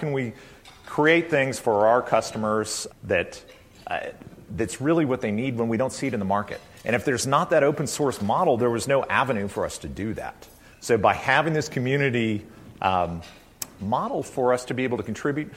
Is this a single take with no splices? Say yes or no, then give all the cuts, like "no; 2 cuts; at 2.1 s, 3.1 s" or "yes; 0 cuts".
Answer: no; 1 cut; at 2.9 s